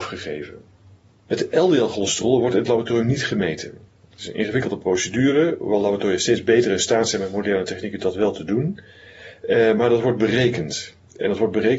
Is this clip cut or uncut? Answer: uncut